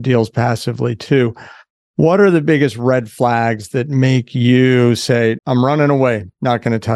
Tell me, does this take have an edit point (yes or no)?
yes